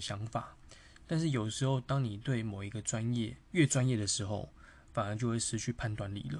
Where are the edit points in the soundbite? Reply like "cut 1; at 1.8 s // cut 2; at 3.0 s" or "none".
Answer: cut 1; at 3.4 s